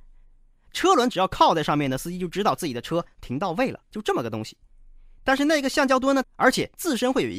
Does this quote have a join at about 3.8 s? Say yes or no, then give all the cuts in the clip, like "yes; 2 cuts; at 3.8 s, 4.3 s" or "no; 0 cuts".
yes; 2 cuts; at 3.8 s, 6.2 s